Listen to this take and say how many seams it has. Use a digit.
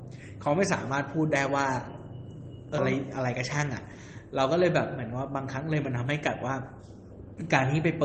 1